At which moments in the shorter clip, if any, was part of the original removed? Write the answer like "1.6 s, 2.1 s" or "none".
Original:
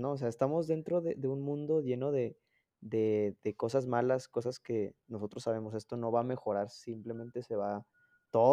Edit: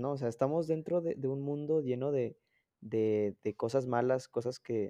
none